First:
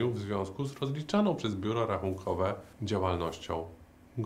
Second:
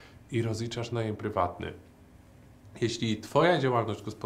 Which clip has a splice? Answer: first; 1 cut; at 2.7 s

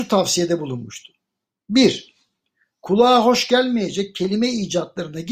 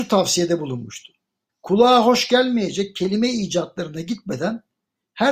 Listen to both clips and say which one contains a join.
second; 1 cut; at 1.5 s

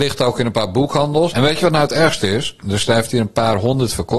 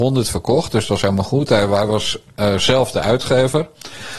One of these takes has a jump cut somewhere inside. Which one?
first; 2 cuts; at 1.3 s, 2.6 s

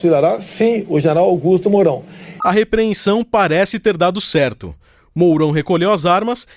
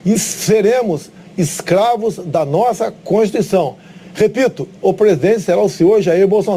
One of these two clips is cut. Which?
first; 1 cut; at 2.4 s

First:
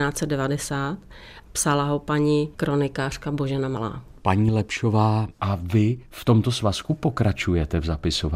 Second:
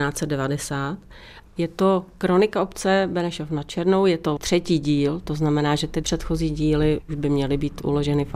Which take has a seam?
second; 1 cut; at 1.5 s

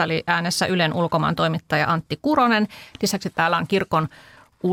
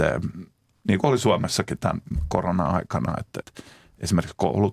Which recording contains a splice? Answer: second; 1 cut; at 3.4 s

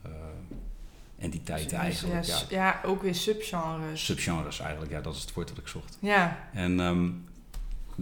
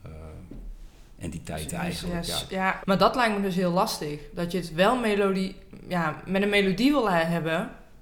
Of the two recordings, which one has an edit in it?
second; 1 cut; at 2.8 s

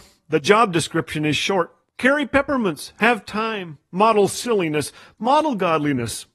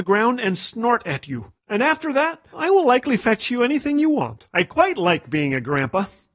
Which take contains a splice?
second; 2 cuts; at 2.5 s, 4.5 s

